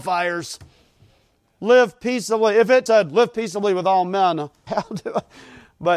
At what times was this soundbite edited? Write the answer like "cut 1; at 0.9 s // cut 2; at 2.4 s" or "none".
cut 1; at 2.9 s // cut 2; at 4.7 s